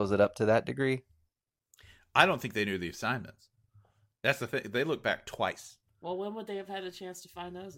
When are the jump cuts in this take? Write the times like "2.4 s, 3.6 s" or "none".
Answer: none

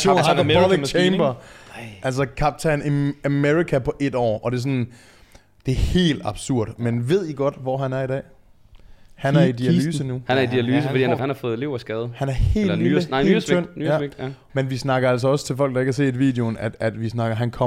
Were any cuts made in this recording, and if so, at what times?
11.2 s, 14.5 s

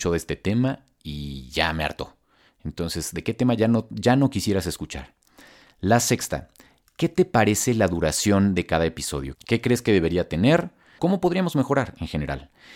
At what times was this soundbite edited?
9.3 s, 11.0 s

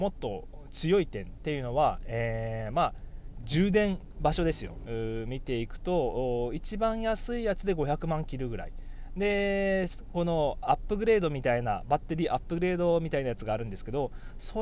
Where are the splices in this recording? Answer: 4.9 s

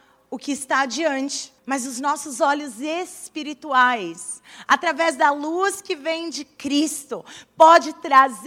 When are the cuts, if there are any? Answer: 1.6 s

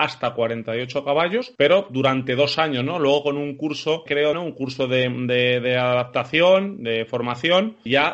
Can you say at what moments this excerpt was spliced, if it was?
4.3 s

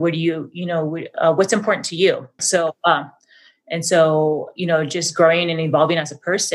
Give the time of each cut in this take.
2.4 s

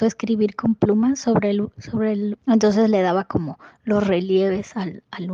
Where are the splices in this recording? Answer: 2.4 s

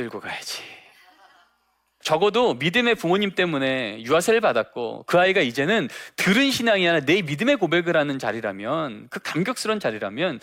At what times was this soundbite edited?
2.0 s

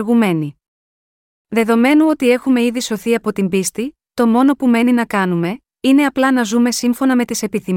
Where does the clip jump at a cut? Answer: 4.1 s

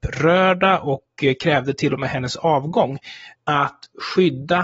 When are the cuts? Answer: 3.3 s

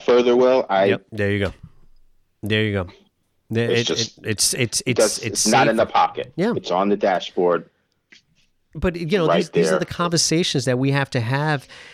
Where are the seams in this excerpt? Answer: 1.1 s

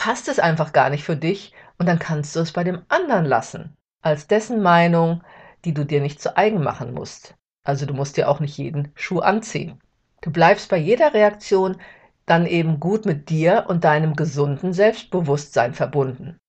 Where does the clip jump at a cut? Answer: none

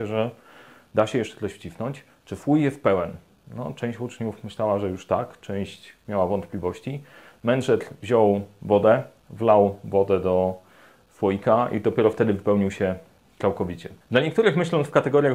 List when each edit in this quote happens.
14.0 s

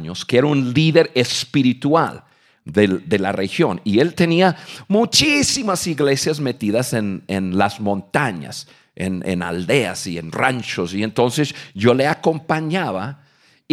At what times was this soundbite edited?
none

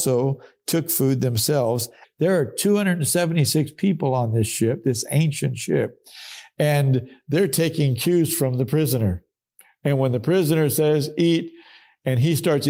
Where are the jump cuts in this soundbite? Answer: 2.0 s

